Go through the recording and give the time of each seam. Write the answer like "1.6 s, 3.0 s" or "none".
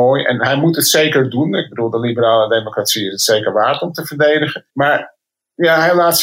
4.7 s